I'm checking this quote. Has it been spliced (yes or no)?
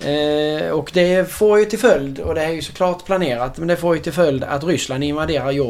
no